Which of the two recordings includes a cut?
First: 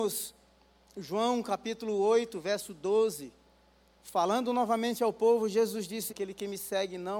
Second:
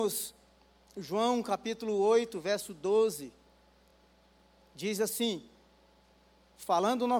first; 2 cuts; at 3.9 s, 6.1 s

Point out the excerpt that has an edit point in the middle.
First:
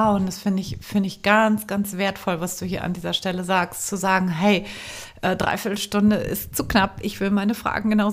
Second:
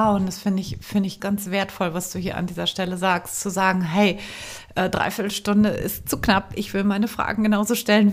second; 1 cut; at 1.2 s

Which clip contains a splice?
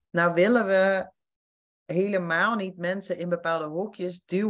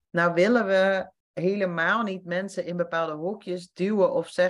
second; 1 cut; at 1.2 s

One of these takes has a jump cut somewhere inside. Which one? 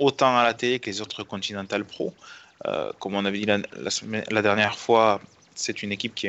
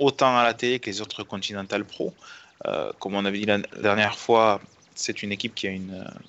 second; 1 cut; at 3.8 s

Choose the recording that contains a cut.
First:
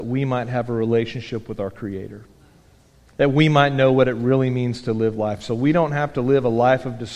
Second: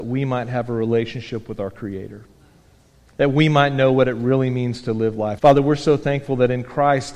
second; 1 cut; at 5.4 s

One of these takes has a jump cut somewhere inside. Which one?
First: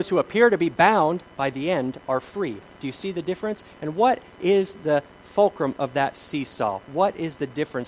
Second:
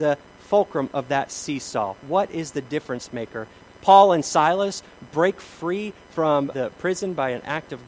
second; 2 cuts; at 3.7 s, 6.5 s

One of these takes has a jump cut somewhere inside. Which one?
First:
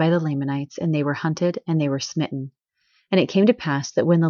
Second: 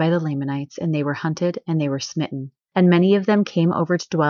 second; 1 cut; at 2.7 s

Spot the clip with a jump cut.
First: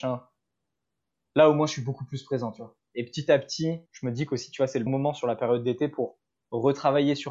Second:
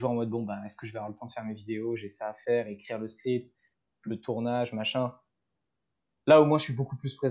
first; 2 cuts; at 3.9 s, 4.9 s

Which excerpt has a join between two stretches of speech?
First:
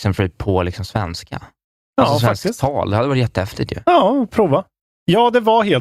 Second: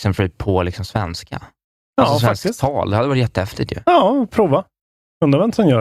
first; 1 cut; at 4.8 s

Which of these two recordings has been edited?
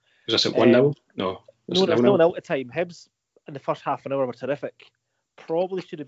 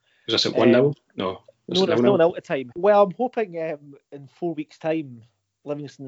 second; 1 cut; at 2.7 s

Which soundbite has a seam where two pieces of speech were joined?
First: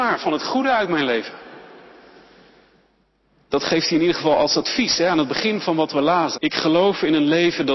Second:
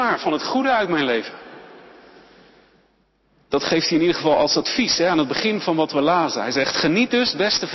first; 1 cut; at 6.3 s

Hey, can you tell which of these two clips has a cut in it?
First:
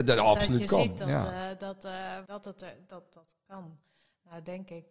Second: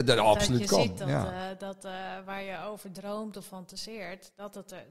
first; 1 cut; at 2.3 s

